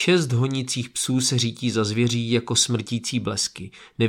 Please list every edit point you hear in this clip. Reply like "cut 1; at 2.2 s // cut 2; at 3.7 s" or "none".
none